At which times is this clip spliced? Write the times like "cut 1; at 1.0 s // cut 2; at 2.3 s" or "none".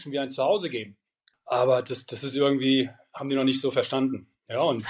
cut 1; at 1.3 s